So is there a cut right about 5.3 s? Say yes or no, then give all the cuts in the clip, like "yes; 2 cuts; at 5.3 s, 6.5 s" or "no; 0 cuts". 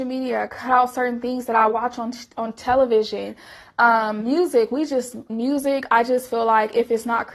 yes; 1 cut; at 5.3 s